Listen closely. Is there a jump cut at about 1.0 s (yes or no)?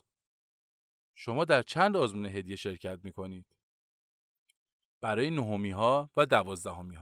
no